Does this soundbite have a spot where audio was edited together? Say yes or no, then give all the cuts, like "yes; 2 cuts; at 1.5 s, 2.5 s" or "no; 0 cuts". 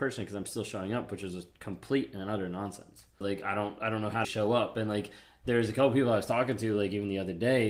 yes; 2 cuts; at 3.2 s, 4.2 s